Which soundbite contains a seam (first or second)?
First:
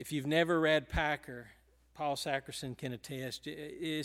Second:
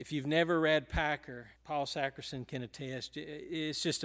second